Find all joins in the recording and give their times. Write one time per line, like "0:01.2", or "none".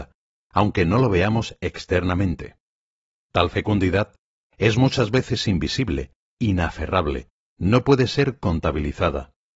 none